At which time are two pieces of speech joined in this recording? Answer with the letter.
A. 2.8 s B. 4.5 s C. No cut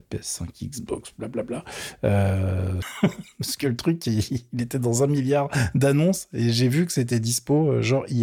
A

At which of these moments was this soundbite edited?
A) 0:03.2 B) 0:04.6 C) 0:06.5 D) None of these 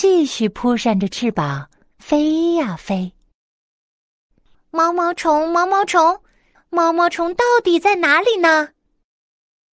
C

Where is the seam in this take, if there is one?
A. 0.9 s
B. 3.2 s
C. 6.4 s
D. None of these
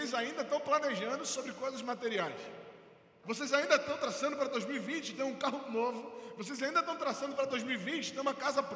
B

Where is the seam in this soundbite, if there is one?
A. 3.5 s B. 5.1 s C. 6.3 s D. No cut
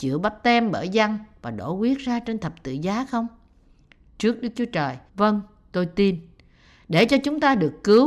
B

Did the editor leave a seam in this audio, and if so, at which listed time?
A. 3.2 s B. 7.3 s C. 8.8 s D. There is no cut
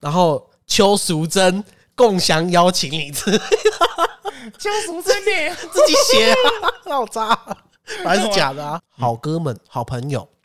C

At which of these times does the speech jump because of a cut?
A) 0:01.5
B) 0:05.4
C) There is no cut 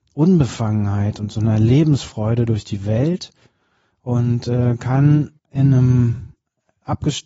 B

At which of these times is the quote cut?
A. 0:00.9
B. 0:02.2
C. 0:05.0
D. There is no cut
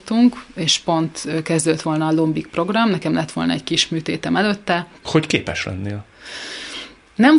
C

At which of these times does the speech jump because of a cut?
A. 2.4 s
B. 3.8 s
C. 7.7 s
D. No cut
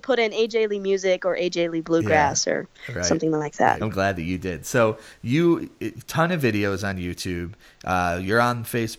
B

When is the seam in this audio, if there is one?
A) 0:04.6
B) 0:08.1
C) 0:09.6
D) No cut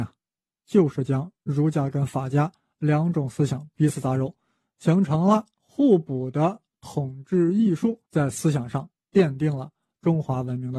B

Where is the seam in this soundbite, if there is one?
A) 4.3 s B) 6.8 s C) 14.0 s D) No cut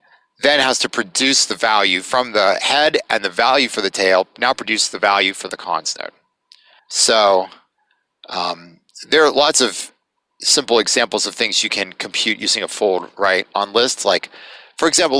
B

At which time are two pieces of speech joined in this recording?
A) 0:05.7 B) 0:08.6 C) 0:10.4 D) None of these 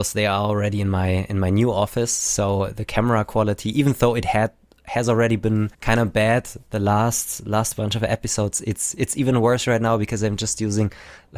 A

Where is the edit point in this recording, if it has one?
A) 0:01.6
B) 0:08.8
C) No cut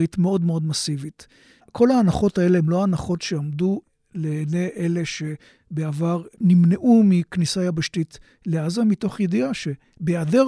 A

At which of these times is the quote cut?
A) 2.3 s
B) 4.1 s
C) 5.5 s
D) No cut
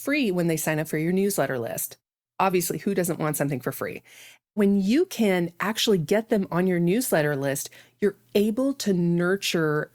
D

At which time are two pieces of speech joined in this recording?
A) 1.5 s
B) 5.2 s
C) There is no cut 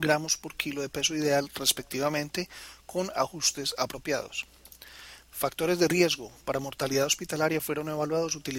B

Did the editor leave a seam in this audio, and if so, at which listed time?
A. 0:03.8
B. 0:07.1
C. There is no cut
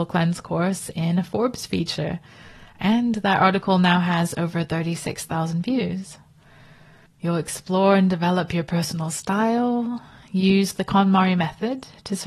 B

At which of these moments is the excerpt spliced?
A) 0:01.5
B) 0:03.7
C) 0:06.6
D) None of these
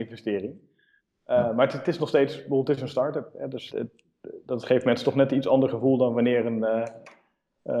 B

